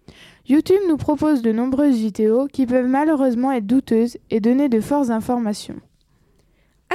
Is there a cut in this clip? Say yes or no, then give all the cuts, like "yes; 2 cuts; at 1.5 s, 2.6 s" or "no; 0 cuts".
yes; 1 cut; at 1.4 s